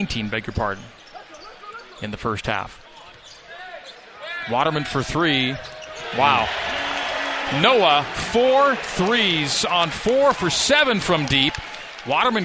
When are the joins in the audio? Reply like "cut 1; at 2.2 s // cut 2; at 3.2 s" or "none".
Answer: none

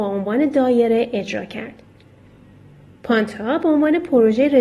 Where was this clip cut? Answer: none

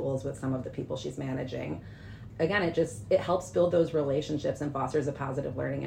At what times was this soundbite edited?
cut 1; at 2.3 s

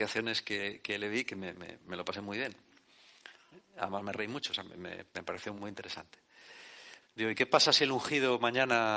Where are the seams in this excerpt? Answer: cut 1; at 5.6 s // cut 2; at 7.0 s

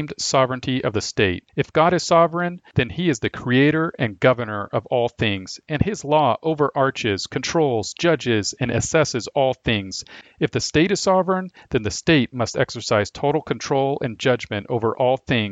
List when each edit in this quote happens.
cut 1; at 1.5 s // cut 2; at 10.2 s

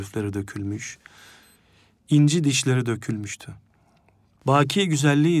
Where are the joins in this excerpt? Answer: cut 1; at 4.4 s

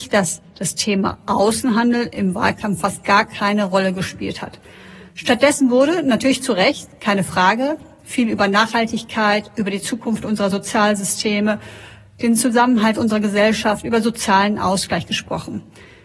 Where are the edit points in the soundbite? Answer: none

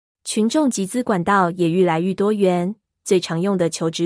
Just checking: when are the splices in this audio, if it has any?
cut 1; at 2.9 s

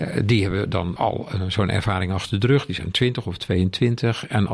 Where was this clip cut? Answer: cut 1; at 1.0 s

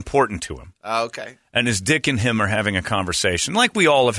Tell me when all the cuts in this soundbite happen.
none

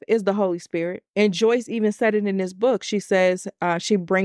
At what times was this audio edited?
cut 1; at 1.1 s

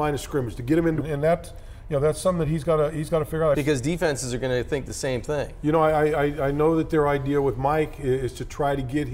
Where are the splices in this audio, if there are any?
cut 1; at 1.0 s // cut 2; at 3.5 s

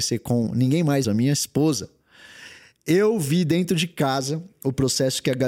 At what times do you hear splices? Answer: cut 1; at 1.0 s

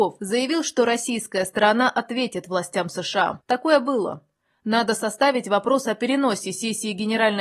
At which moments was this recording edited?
cut 1; at 3.4 s

